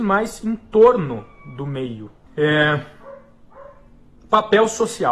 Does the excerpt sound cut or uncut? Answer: cut